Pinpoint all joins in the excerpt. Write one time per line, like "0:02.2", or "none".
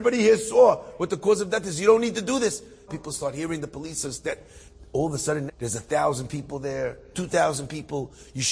0:02.9
0:05.5
0:07.1